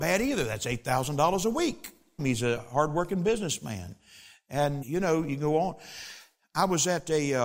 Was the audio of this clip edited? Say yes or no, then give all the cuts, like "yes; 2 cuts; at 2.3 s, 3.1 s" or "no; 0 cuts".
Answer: yes; 2 cuts; at 2.2 s, 4.8 s